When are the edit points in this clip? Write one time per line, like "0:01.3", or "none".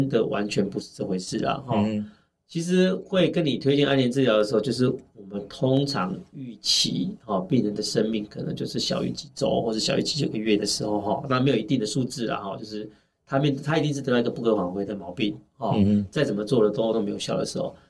0:16.9